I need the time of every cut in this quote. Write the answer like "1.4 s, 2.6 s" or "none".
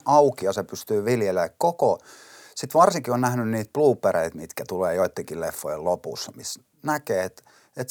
none